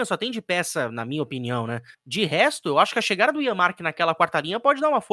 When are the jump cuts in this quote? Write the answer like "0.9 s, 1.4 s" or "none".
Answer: 1.9 s

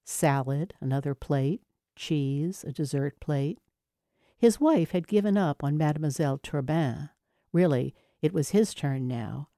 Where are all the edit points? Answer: none

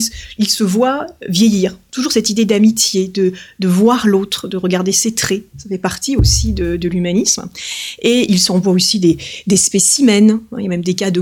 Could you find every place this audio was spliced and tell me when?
none

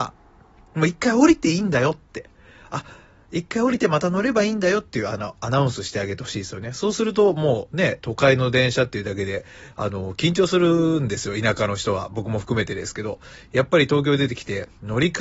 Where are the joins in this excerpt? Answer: none

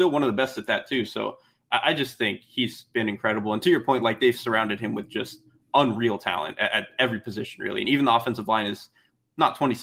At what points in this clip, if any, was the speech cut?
none

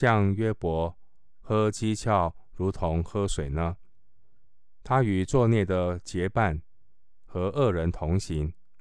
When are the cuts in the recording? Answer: none

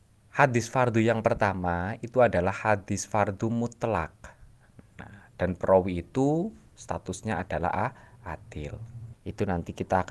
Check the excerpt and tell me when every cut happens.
4.8 s, 9.1 s

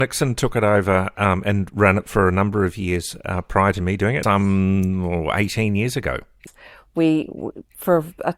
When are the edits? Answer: 4.2 s

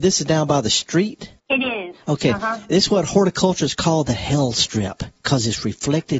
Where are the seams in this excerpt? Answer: 1.4 s

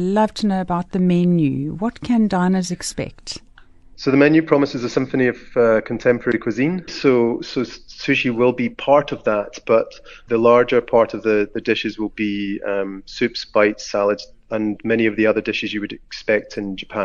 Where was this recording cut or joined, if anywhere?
6.9 s

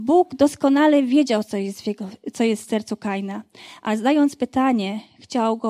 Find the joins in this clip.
none

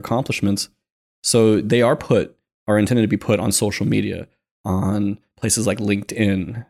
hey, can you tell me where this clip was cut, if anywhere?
none

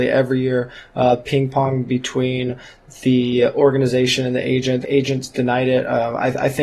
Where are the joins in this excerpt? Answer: 4.8 s

